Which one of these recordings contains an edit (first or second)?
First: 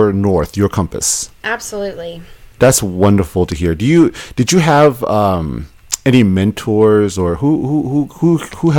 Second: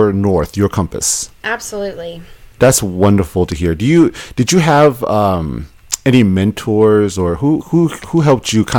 second